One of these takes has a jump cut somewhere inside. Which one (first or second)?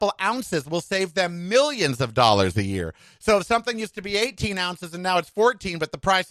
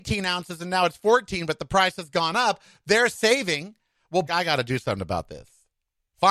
second